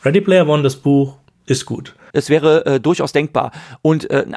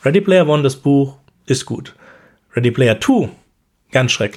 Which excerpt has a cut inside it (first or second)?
first